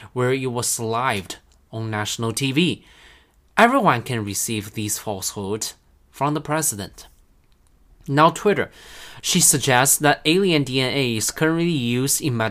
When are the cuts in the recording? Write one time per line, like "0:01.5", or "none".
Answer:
0:09.2